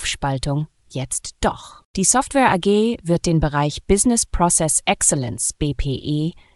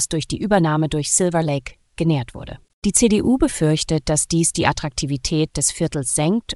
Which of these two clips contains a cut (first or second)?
second